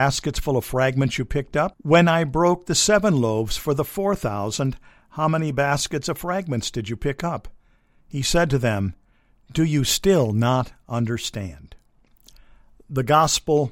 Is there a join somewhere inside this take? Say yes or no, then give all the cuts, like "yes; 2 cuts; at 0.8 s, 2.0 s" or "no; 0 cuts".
yes; 2 cuts; at 1.7 s, 8.0 s